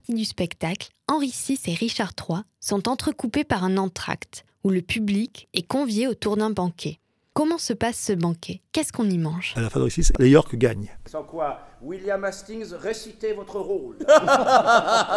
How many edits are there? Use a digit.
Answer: 2